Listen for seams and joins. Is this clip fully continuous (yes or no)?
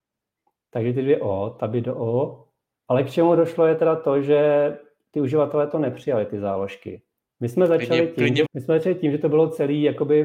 no